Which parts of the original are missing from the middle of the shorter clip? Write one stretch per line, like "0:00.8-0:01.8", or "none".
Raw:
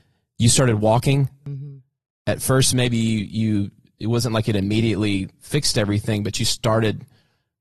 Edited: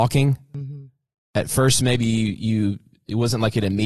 none

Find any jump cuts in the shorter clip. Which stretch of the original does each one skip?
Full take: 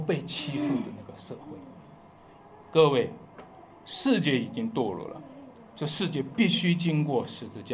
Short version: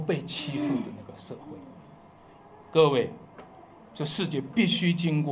0:03.8-0:05.6

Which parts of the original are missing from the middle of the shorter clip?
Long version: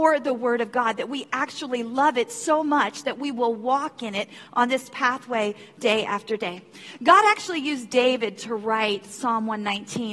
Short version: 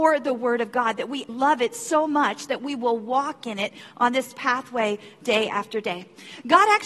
0:01.3-0:01.9

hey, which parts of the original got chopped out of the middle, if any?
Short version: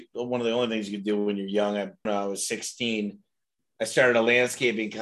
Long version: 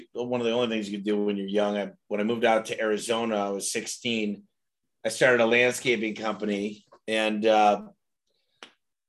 0:02.1-0:03.3

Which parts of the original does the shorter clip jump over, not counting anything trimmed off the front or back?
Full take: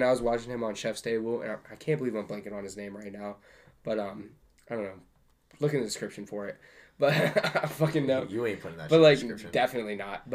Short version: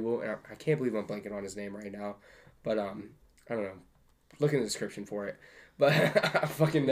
none

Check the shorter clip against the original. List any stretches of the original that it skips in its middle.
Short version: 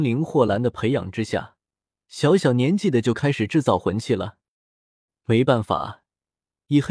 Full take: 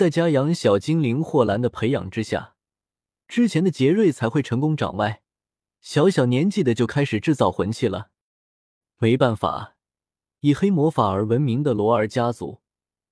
0:02.9-0:05.6

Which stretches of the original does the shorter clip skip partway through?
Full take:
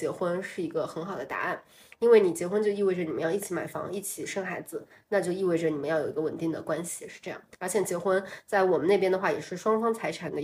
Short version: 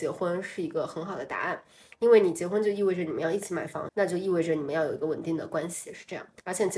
0:03.9-0:05.0

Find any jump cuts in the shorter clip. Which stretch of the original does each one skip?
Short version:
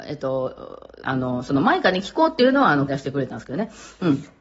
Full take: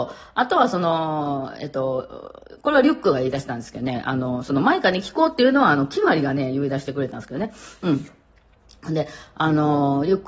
0:02.6-0:04.0
0:05.9-0:06.7

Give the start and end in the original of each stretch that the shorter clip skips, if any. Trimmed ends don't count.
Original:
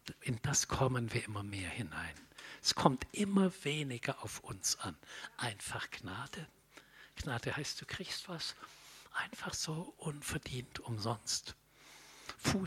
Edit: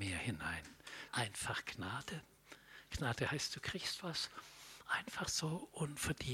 0:02.6-0:05.3

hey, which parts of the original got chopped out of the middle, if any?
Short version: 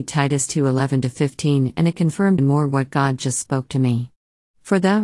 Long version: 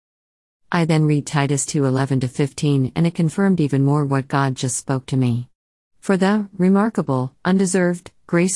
0:03.6-0:03.8

